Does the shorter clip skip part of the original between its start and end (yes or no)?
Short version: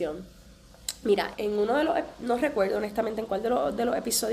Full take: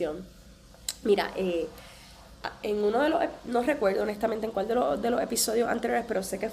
yes